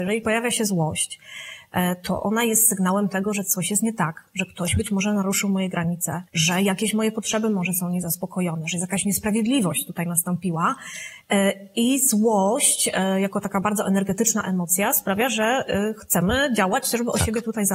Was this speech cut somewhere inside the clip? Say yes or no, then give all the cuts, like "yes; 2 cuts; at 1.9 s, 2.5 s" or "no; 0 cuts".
yes; 1 cut; at 6.3 s